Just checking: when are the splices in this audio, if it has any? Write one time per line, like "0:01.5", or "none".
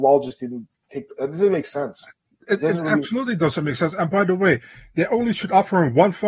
none